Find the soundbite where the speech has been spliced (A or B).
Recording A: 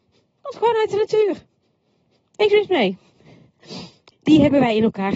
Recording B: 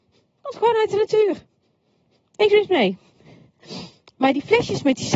A